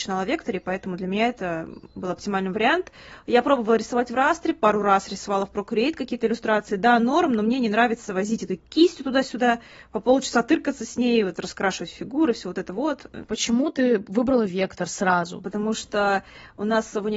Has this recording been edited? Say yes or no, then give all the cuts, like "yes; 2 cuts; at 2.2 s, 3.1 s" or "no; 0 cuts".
yes; 1 cut; at 13.3 s